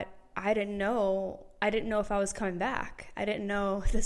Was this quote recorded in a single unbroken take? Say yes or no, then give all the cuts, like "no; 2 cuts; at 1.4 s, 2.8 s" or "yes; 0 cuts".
yes; 0 cuts